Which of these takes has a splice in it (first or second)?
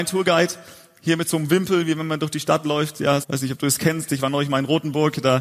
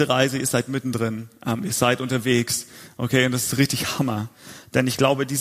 first